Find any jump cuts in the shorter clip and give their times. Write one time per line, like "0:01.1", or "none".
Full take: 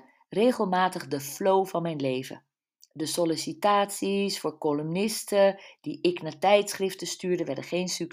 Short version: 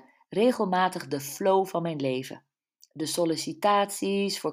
none